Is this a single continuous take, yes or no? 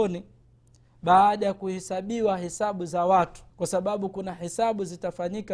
no